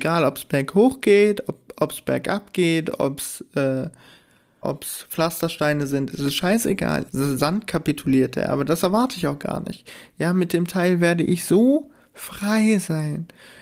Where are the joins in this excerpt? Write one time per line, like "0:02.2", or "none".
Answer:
0:04.6
0:07.1